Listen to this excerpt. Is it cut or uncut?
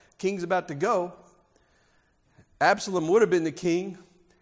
uncut